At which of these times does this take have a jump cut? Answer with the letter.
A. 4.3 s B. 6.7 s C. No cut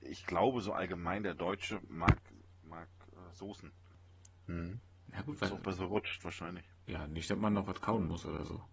A